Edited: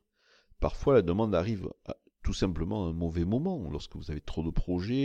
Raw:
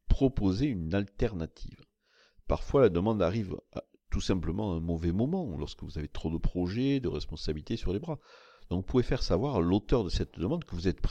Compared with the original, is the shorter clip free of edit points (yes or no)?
yes